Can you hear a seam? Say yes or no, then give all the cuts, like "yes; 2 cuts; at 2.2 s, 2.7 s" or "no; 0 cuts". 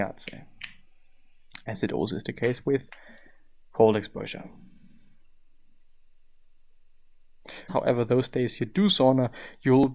yes; 1 cut; at 7.7 s